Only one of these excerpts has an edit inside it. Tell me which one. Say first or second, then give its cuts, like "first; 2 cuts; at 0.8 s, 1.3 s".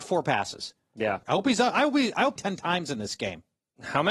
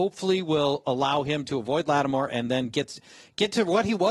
first; 2 cuts; at 1.2 s, 2.4 s